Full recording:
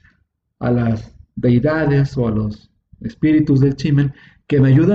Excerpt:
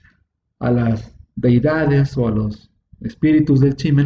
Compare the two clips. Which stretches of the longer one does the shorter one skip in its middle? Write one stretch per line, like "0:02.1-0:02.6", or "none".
none